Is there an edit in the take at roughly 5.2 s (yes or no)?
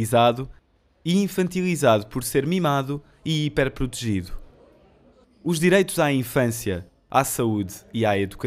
yes